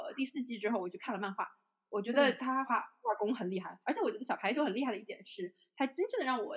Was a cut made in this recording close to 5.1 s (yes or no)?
no